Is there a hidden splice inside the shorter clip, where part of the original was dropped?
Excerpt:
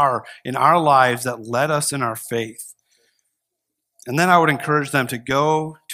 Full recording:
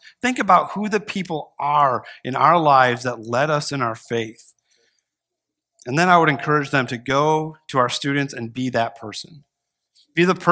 no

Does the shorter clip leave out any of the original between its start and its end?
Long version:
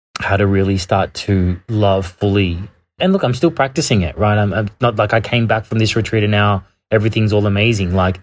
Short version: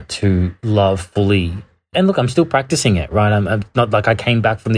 no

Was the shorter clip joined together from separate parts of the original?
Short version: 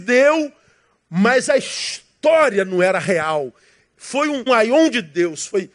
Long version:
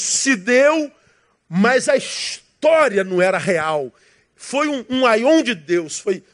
yes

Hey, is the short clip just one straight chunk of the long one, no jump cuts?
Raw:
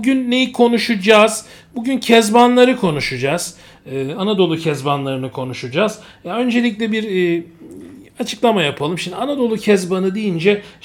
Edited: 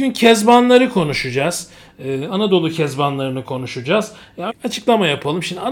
no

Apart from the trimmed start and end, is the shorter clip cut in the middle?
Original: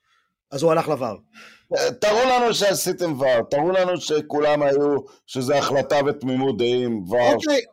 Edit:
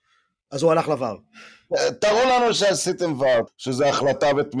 yes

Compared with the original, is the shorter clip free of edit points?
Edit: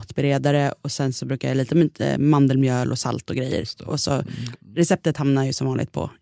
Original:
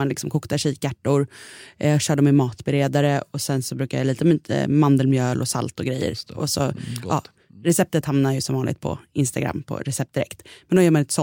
no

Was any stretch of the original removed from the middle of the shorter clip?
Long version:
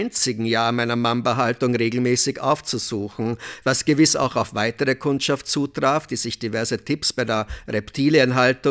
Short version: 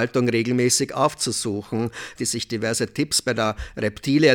yes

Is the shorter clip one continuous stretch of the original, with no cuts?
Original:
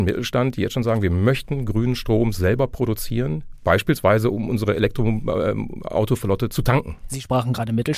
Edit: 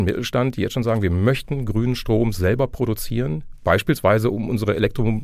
yes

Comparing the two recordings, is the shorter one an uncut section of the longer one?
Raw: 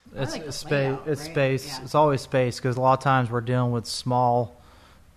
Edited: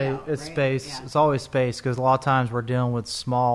yes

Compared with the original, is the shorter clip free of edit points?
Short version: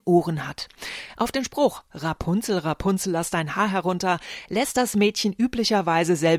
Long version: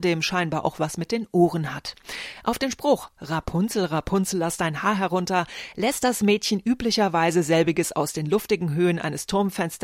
yes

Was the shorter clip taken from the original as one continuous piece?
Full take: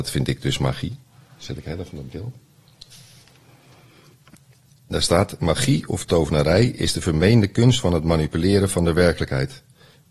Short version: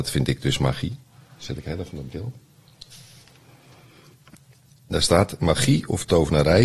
yes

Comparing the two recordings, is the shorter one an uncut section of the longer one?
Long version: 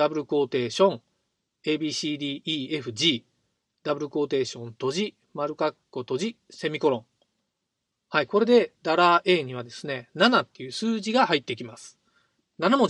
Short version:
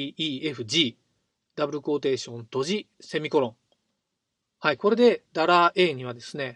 no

